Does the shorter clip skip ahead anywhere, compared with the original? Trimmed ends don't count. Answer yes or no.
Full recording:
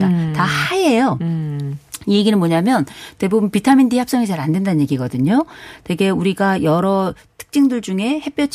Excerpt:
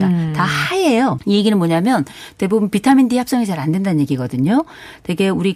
yes